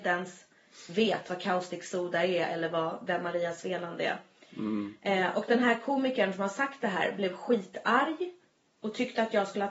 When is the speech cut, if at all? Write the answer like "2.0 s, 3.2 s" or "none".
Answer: none